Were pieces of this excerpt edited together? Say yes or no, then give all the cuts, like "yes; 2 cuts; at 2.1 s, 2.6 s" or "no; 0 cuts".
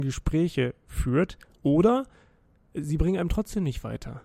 yes; 1 cut; at 1.6 s